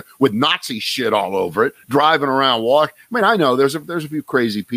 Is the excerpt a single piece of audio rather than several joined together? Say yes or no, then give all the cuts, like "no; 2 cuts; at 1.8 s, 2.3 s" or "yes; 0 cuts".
yes; 0 cuts